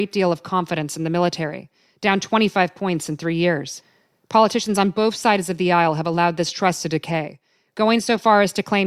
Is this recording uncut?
yes; 0 cuts

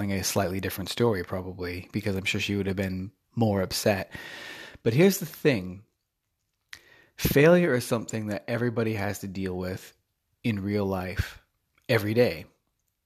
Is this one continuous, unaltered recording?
yes; 0 cuts

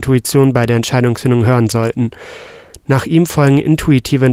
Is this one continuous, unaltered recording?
yes; 0 cuts

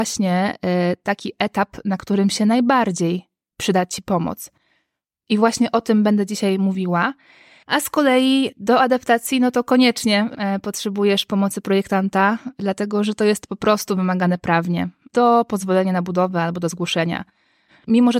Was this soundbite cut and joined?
no; 0 cuts

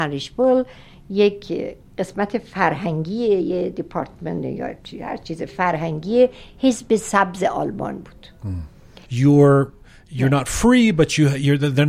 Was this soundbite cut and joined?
yes; 1 cut; at 9.1 s

